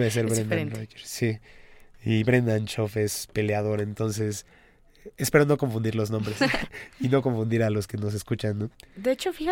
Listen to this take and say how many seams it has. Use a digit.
0